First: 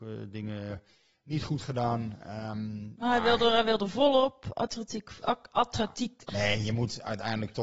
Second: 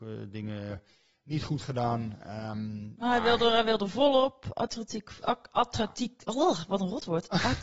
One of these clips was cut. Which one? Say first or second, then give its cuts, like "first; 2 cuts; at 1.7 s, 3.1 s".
first; 1 cut; at 6.3 s